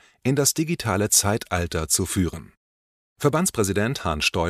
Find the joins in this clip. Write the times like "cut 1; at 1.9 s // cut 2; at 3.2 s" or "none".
cut 1; at 3.0 s